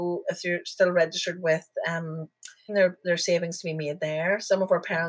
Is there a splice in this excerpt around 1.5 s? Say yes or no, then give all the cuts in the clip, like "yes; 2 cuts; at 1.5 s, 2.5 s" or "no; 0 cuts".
no; 1 cut; at 2.7 s